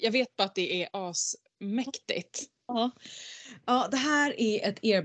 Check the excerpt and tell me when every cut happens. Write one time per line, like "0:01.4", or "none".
none